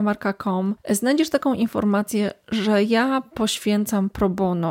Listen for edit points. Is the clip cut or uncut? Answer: uncut